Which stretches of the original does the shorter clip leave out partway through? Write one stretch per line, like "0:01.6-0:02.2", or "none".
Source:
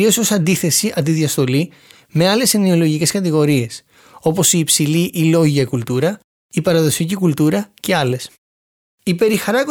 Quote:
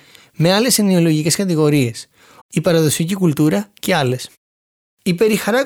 0:04.2-0:06.4